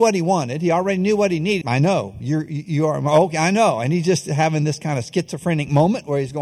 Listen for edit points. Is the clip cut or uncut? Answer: cut